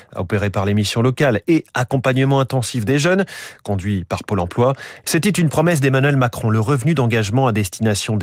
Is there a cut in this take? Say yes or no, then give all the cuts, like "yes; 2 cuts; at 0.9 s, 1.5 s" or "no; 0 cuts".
yes; 1 cut; at 5.0 s